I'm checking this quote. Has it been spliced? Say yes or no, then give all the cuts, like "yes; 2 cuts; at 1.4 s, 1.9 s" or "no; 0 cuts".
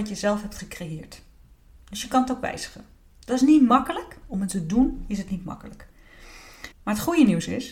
yes; 2 cuts; at 4.2 s, 6.7 s